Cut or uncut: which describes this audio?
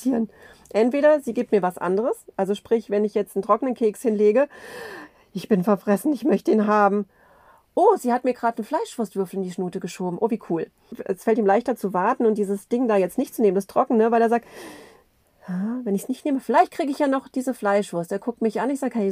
uncut